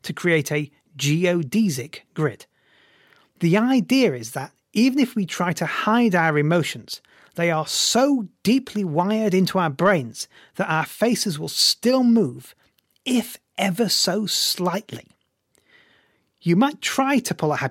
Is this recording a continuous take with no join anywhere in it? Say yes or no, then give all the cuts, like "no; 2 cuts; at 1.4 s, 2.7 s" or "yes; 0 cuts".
yes; 0 cuts